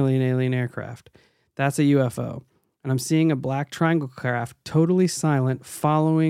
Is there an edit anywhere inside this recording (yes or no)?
no